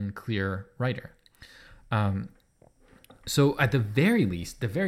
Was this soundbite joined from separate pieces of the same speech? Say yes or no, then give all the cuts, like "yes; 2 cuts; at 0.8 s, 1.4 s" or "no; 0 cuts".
no; 0 cuts